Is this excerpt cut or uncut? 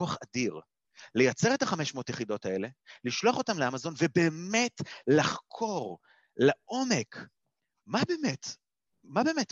uncut